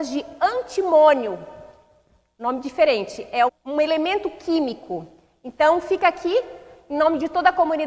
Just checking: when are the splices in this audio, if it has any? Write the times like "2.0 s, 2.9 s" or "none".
3.5 s